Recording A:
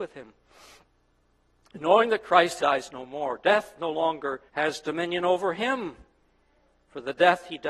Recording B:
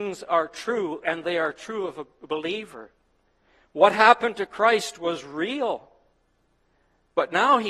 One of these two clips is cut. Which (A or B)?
A